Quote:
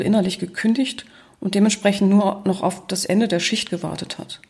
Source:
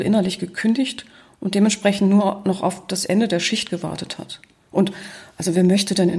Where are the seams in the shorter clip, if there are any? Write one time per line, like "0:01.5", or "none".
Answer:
none